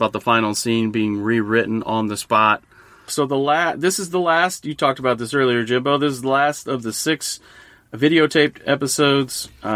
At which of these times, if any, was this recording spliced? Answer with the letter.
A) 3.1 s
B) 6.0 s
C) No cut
A